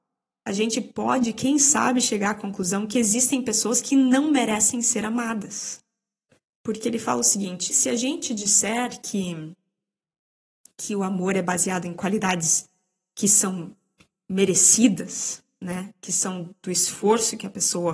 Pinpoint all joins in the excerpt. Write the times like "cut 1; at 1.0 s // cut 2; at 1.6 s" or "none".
cut 1; at 6.5 s // cut 2; at 7.7 s

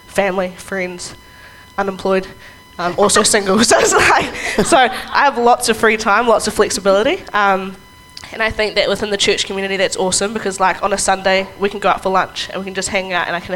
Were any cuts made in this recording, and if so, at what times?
none

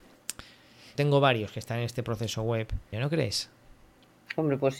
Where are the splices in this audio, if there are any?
cut 1; at 1.0 s // cut 2; at 2.9 s

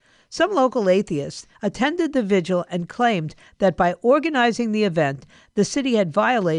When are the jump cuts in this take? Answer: cut 1; at 1.5 s

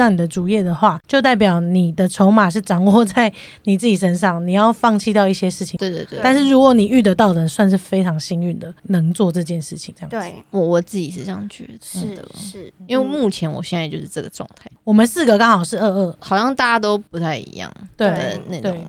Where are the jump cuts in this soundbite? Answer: cut 1; at 5.8 s

